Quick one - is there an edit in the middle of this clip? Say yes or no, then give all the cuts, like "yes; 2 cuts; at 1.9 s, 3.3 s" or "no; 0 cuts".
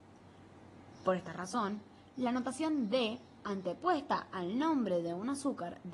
no; 0 cuts